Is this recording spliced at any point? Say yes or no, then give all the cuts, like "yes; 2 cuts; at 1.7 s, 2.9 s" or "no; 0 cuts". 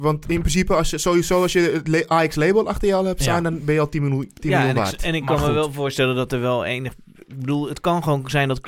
no; 0 cuts